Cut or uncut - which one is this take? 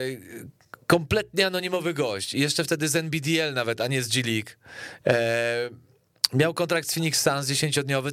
cut